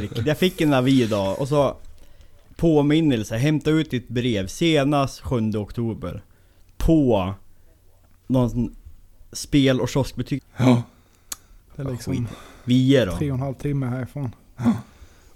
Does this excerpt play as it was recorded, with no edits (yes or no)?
no